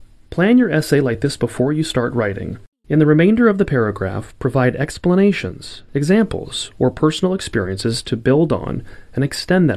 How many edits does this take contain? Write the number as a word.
two